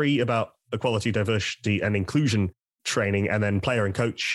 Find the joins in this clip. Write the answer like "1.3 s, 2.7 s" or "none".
none